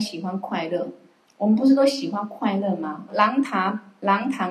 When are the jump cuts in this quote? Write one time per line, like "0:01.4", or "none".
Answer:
0:01.2
0:03.1